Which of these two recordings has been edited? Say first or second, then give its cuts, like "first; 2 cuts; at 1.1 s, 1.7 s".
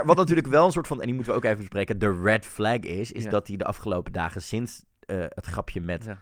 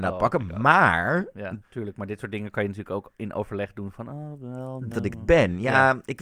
second; 2 cuts; at 1.6 s, 4.9 s